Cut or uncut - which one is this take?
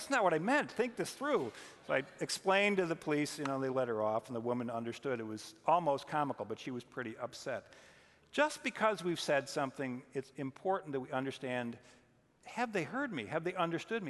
uncut